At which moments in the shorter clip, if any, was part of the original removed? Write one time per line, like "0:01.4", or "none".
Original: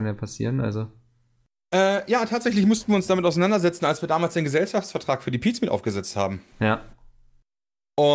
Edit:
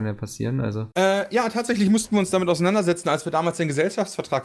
0:00.9